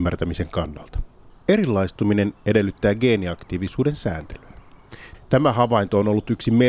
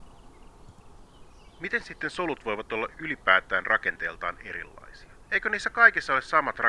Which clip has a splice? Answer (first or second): first